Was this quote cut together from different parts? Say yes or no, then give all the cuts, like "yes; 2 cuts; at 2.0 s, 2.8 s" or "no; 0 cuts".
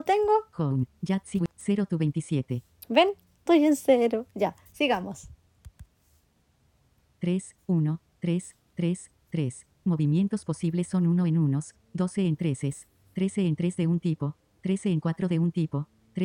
no; 0 cuts